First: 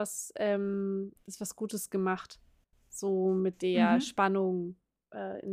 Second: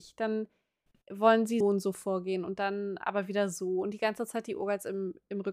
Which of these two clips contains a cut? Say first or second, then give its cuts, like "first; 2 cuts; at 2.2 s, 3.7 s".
second; 1 cut; at 1.6 s